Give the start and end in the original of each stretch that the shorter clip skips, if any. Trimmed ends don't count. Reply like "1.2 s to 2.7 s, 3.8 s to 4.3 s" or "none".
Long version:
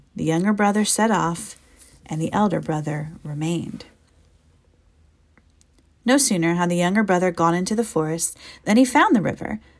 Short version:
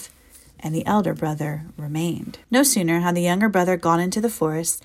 3.9 s to 6.0 s